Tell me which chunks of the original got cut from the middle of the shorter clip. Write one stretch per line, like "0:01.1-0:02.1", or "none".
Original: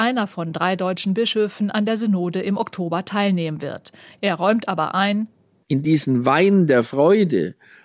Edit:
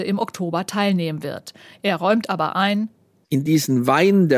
none